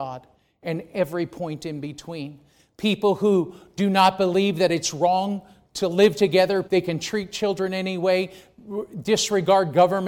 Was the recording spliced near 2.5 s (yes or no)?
no